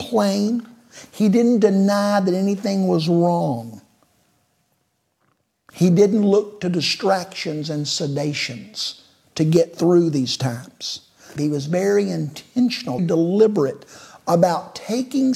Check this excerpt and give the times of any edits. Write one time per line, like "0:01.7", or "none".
0:11.4
0:13.0